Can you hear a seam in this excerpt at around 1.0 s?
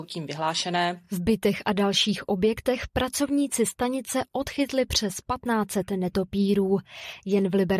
no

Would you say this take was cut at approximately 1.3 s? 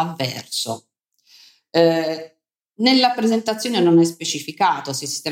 no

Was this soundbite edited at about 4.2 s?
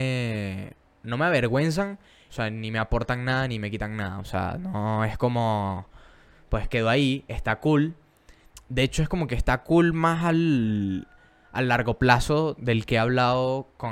no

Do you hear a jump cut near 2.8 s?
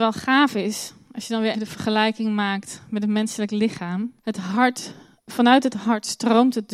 no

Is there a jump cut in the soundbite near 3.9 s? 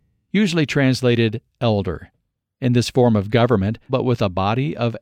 yes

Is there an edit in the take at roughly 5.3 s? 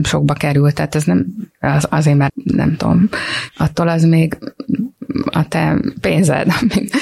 no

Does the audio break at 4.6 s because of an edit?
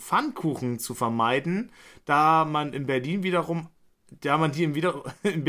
no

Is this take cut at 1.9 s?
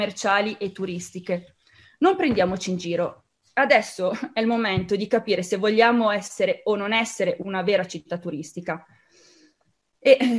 no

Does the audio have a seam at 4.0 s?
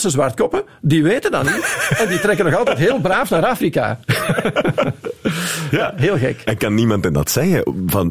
no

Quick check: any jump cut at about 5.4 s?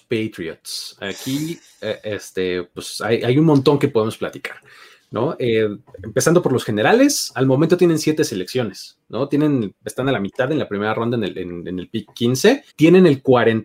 no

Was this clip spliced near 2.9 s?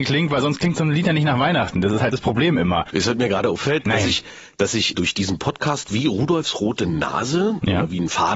yes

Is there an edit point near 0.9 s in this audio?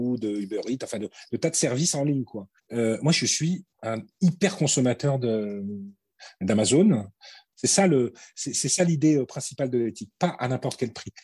no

